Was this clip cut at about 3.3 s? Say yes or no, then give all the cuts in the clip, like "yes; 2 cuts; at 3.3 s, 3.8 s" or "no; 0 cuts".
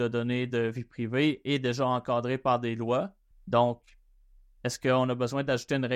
yes; 1 cut; at 3.3 s